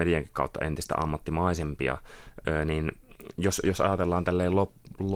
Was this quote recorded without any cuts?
yes; 0 cuts

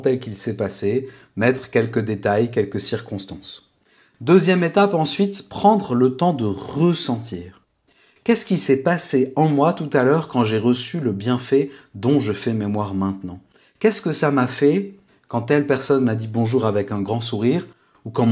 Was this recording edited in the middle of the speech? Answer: no; 0 cuts

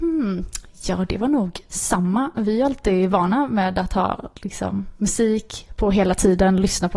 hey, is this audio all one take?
yes; 0 cuts

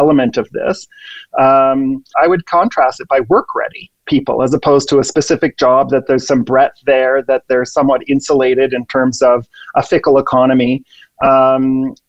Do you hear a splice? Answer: yes; 2 cuts; at 2.1 s, 4.0 s

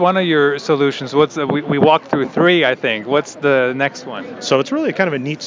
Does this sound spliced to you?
yes; 1 cut; at 4.4 s

